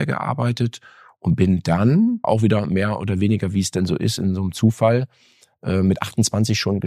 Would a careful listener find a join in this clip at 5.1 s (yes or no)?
no